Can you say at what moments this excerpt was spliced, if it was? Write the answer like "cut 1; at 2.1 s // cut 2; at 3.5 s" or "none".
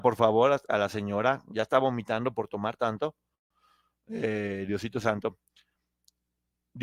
none

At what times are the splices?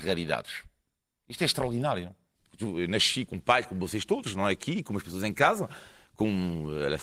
none

